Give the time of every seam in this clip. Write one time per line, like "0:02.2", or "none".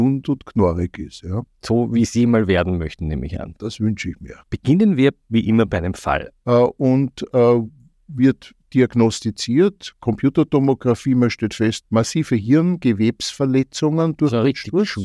0:06.3
0:11.8